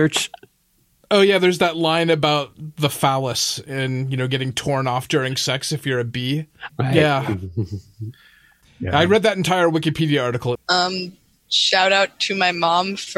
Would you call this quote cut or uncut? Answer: cut